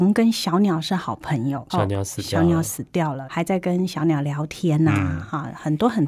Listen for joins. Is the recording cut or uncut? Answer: cut